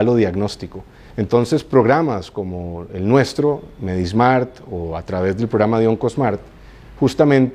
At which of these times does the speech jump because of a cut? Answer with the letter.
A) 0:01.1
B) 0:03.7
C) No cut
A